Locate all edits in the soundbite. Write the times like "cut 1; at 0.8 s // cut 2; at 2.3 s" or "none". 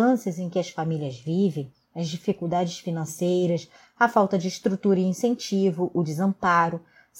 none